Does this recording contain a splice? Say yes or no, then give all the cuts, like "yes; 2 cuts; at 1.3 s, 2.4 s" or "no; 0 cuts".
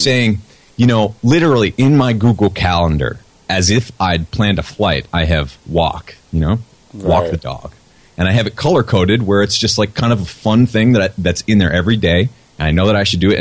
no; 0 cuts